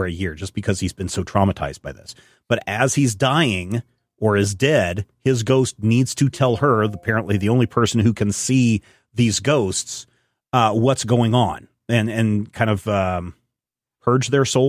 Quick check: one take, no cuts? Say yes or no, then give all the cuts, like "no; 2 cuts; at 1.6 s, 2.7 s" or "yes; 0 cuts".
yes; 0 cuts